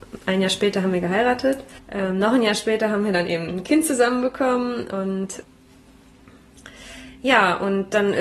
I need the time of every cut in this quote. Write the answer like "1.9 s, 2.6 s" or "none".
1.8 s